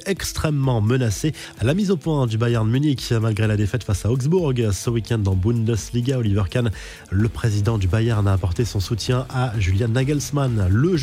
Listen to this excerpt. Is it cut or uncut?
uncut